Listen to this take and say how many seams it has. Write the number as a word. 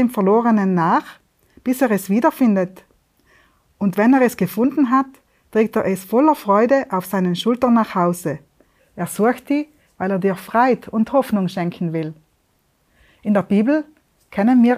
one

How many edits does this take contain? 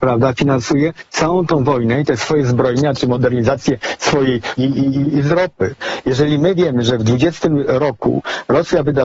one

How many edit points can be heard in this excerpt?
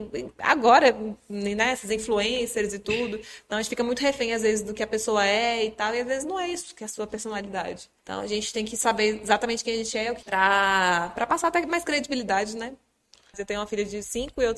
three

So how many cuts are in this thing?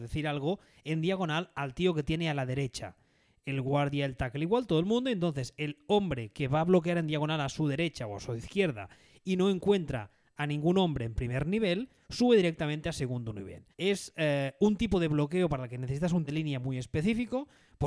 two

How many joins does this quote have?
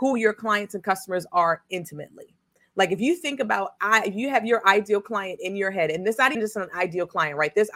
one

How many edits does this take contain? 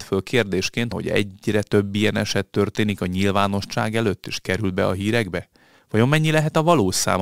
one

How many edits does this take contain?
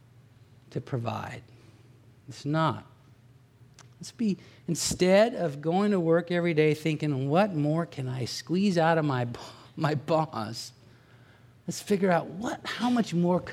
zero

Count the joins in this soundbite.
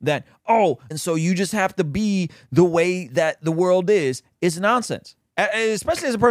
one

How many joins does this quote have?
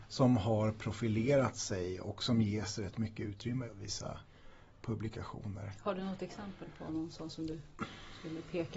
one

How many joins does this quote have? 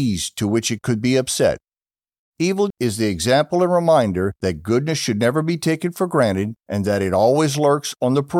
one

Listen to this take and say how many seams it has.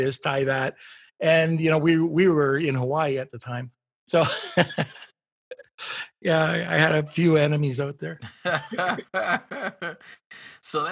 zero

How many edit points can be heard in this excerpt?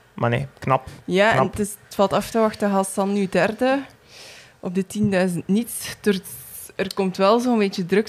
zero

